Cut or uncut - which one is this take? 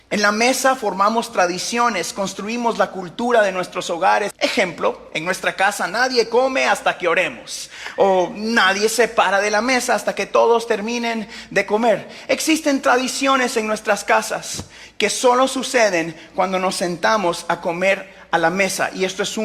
cut